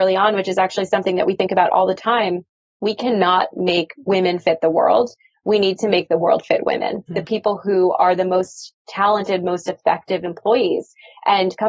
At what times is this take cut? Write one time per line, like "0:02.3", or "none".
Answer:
0:07.1